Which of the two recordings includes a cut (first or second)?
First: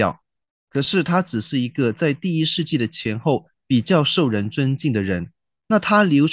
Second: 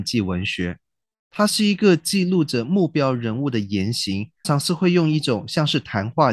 second